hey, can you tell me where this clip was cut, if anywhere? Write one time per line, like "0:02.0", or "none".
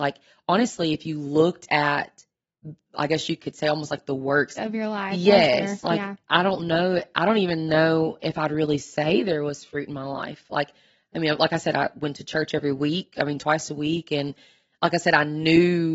0:04.6